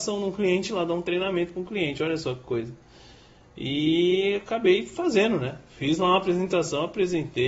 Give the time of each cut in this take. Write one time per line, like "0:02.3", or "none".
none